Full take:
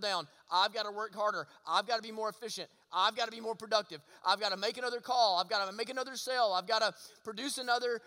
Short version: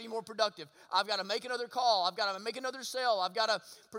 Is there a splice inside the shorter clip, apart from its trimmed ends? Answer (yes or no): no